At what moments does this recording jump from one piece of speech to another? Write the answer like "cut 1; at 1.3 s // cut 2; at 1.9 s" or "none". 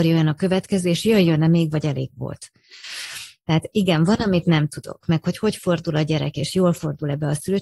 none